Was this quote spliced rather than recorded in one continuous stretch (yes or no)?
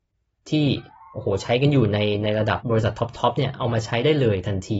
yes